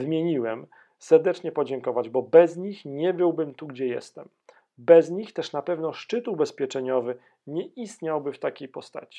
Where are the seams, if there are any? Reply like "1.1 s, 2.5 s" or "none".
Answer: none